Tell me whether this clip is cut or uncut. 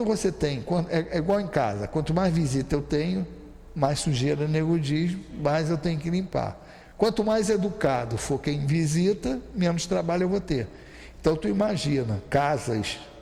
uncut